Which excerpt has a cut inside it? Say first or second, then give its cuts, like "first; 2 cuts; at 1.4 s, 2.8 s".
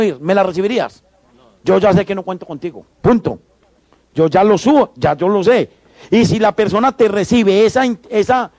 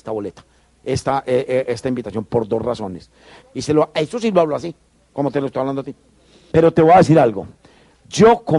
second; 2 cuts; at 3.4 s, 6.5 s